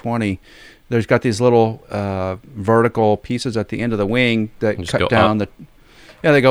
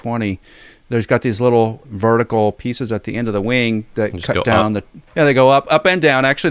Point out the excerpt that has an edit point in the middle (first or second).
second